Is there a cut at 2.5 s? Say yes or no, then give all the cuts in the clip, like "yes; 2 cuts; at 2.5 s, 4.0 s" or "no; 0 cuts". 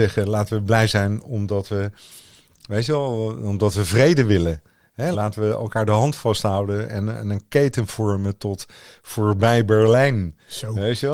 no; 1 cut; at 5.1 s